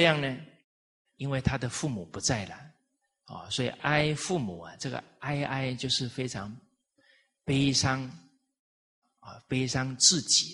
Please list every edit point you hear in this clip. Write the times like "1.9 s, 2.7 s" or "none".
3.8 s